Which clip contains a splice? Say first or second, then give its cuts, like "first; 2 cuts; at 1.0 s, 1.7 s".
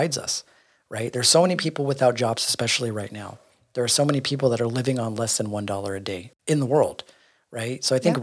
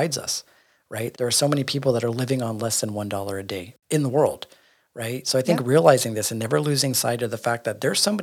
second; 1 cut; at 1.1 s